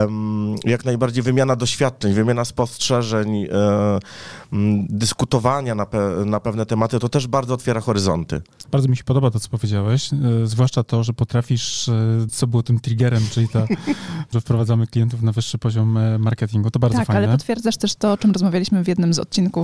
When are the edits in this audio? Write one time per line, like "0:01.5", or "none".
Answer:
0:08.7
0:12.3
0:14.3